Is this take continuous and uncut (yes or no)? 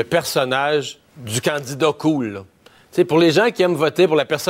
no